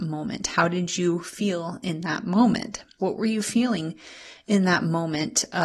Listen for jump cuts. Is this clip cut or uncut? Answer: cut